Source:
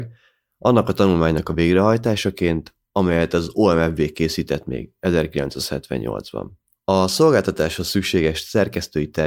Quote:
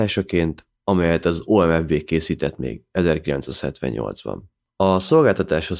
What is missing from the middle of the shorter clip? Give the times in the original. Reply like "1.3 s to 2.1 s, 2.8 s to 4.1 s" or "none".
none

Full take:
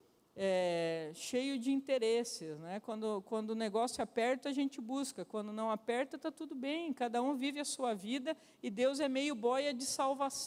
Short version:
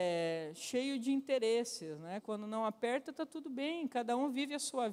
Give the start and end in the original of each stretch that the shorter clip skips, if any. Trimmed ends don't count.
2.8 s to 5.3 s

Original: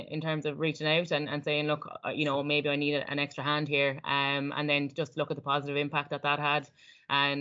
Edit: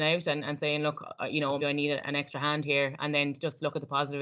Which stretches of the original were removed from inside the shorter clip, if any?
2.4 s to 2.6 s, 4.0 s to 4.5 s

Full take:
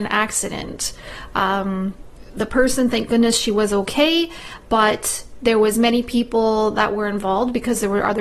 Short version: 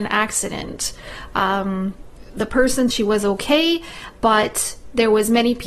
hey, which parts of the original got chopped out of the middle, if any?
2.9 s to 3.4 s

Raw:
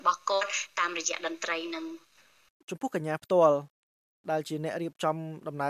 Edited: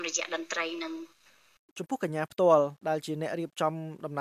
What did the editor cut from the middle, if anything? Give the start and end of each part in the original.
3.7 s to 4.2 s

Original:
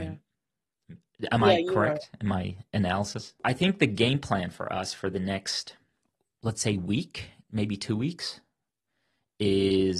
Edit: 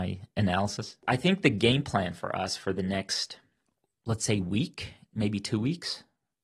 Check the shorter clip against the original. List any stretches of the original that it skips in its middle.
none

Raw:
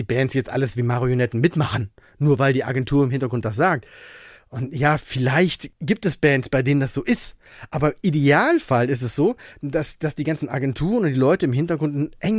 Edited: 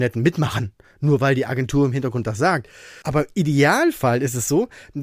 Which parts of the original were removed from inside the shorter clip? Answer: 4.2 s to 7.7 s

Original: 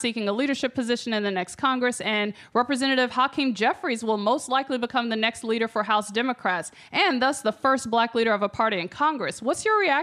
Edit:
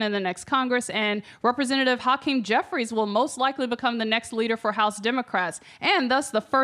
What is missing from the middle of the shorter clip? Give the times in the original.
none

